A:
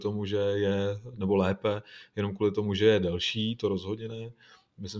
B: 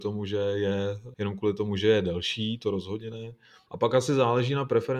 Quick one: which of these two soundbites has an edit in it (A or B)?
B